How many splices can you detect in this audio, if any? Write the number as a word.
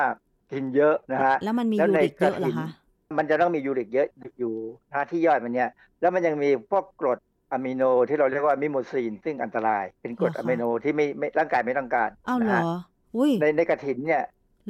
one